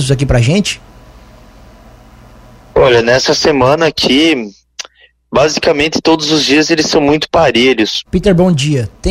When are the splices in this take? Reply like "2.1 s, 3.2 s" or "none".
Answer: 8.1 s